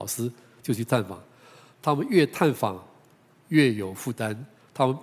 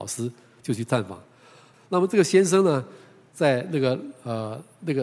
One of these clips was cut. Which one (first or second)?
second